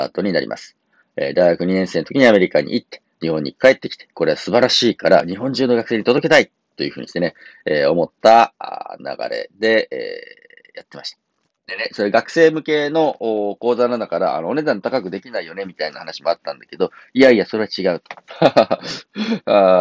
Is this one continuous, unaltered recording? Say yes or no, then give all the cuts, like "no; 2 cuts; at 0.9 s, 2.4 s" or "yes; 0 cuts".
no; 1 cut; at 18.3 s